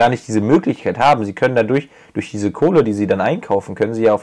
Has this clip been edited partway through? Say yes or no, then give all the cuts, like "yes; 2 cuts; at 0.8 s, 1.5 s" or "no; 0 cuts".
no; 0 cuts